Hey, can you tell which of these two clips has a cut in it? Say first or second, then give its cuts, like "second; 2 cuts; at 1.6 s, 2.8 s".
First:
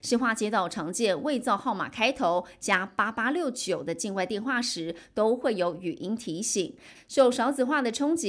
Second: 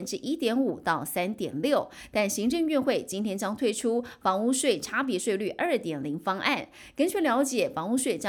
first; 1 cut; at 7.0 s